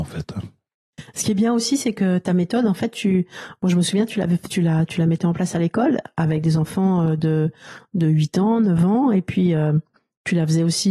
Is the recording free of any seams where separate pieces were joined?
yes; 0 cuts

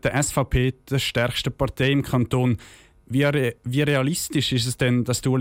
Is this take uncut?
yes; 0 cuts

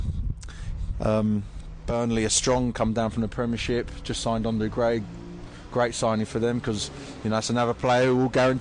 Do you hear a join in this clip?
yes; 1 cut; at 0.9 s

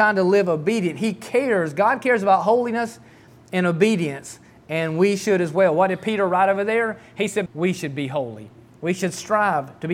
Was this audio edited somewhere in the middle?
yes; 1 cut; at 7.5 s

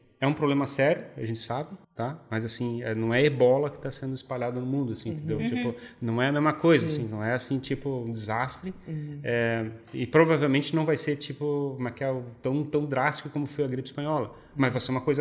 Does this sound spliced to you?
yes; 1 cut; at 1.8 s

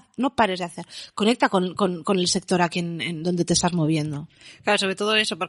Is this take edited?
no; 0 cuts

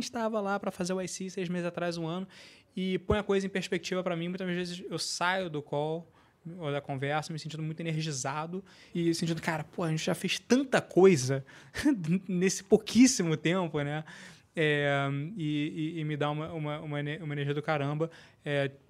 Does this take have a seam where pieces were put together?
no; 0 cuts

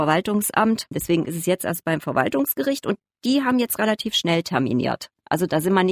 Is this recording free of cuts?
no; 1 cut; at 0.9 s

